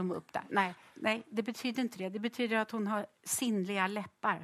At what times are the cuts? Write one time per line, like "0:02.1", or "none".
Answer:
0:00.9